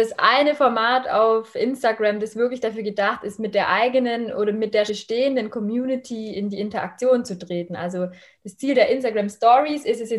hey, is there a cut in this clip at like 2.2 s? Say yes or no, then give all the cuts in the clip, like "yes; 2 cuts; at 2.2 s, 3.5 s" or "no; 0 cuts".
no; 1 cut; at 4.9 s